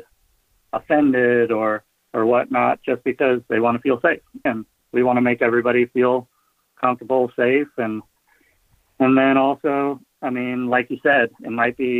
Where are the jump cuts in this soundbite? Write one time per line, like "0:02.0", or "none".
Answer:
0:04.5